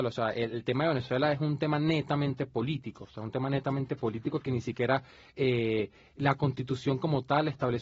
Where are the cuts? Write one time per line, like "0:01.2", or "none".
none